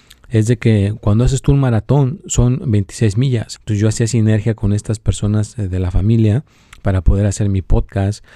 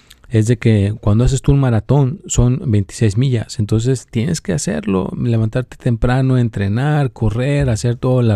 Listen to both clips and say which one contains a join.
first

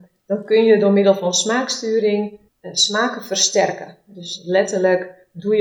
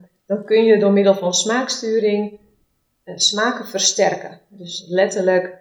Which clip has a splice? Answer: first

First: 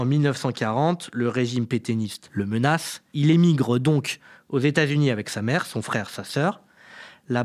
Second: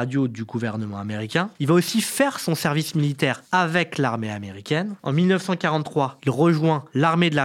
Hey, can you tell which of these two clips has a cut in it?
second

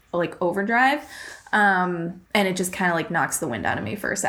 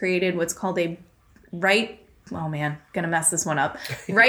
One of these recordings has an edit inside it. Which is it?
first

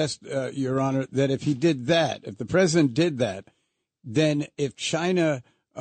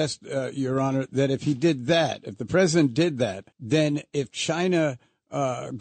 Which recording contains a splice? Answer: second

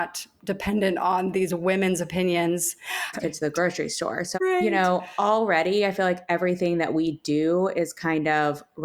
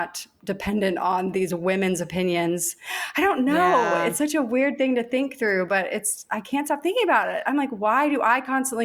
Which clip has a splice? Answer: first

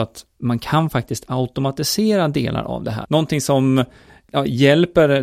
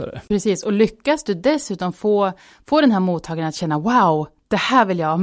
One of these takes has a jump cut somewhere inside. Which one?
first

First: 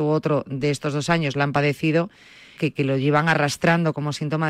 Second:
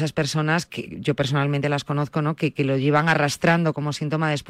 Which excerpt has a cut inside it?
first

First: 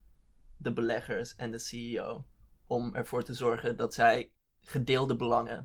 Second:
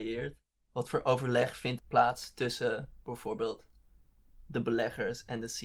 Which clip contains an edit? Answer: second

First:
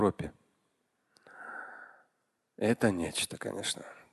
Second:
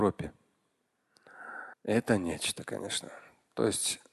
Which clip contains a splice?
second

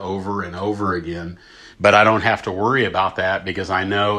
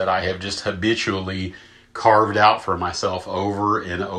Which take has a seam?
first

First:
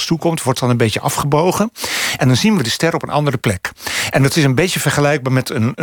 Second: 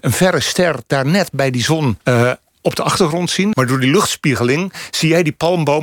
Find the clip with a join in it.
second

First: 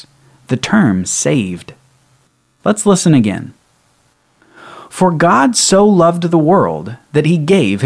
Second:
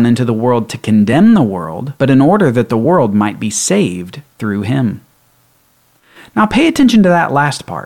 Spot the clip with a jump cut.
second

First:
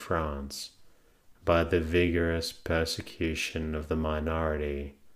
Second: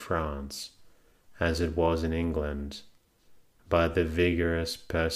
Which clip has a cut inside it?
first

